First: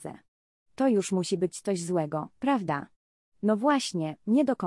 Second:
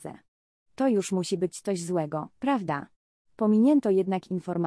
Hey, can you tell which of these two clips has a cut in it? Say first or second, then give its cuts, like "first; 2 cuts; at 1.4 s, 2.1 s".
second; 1 cut; at 3.2 s